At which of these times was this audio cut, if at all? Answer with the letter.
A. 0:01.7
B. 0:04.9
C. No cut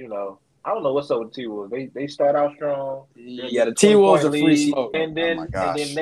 B